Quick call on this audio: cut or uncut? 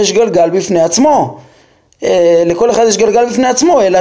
uncut